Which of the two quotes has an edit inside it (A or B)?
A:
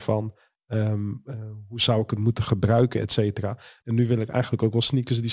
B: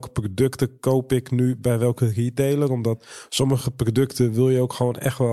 A